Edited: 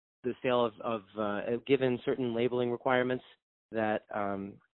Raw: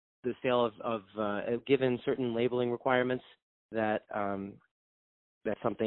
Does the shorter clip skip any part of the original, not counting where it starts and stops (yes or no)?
no